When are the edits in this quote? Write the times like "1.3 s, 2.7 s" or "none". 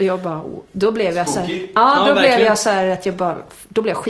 none

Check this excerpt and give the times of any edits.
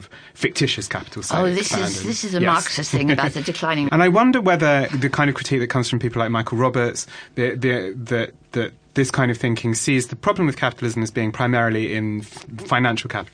3.9 s, 4.9 s

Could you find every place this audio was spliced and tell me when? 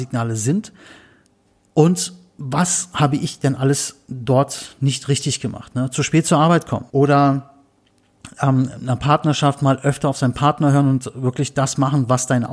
6.9 s

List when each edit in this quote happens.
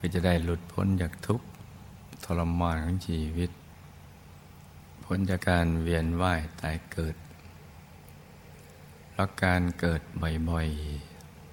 5.4 s

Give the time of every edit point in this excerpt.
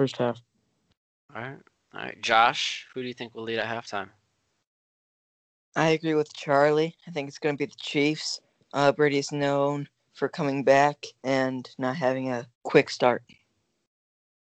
11.2 s, 12.5 s

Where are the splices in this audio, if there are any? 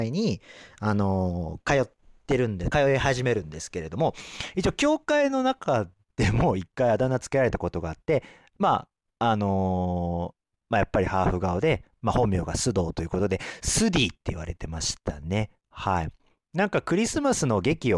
none

